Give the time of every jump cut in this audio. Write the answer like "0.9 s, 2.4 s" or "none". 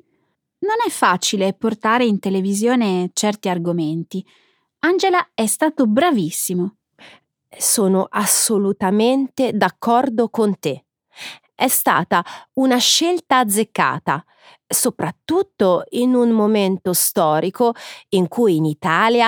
none